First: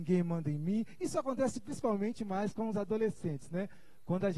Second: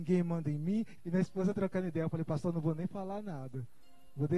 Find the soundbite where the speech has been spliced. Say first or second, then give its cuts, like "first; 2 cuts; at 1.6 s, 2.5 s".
second; 1 cut; at 1.0 s